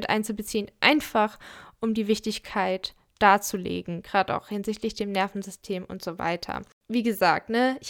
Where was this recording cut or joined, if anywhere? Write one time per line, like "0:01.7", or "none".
none